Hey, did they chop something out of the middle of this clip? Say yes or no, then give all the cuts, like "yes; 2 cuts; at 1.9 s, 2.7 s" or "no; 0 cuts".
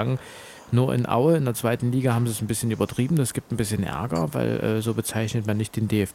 no; 0 cuts